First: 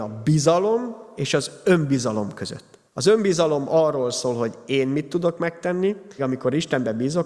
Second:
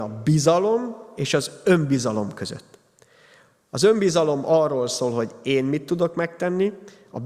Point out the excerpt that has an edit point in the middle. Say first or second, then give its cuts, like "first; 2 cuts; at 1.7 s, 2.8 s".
first; 2 cuts; at 2.9 s, 6.2 s